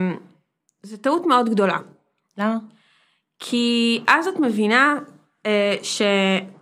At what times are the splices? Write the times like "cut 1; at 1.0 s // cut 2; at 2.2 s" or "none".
none